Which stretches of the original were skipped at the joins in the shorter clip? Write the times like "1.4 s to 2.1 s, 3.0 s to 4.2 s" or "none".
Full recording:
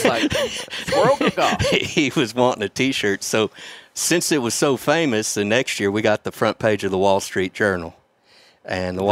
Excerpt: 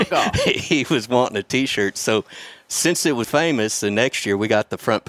4.5 s to 4.8 s